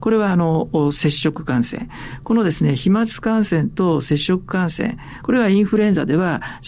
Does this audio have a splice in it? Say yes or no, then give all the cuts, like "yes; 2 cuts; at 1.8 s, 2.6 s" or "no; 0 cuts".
yes; 1 cut; at 5.2 s